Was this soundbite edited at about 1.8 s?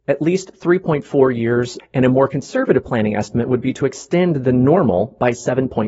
yes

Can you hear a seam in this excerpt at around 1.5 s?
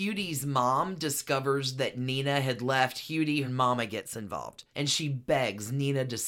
no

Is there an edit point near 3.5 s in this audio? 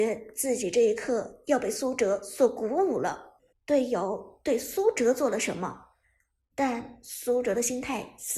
yes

